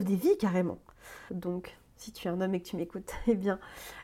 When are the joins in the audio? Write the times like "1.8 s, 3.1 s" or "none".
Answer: 1.3 s